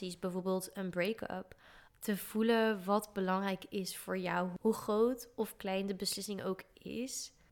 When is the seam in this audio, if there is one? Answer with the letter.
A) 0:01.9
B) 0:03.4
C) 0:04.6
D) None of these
A